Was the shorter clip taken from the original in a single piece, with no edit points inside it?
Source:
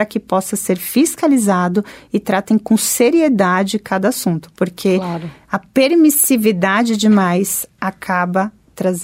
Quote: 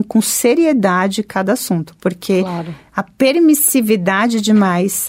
yes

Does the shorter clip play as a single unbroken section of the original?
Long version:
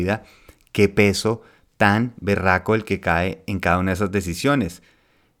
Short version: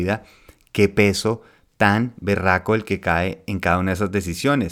yes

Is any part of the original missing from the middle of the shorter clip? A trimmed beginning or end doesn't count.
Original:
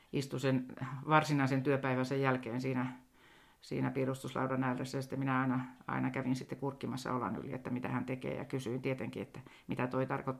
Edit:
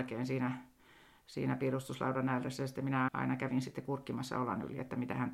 yes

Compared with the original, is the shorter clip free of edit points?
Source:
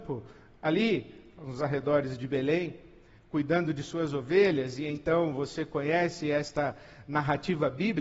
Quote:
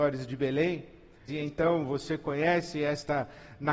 no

